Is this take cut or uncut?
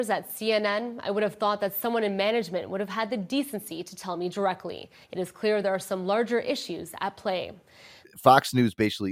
cut